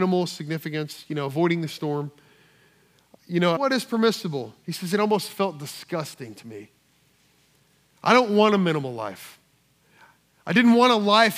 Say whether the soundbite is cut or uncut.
cut